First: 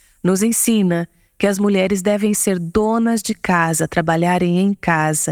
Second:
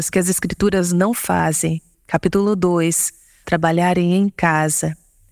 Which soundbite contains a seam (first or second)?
second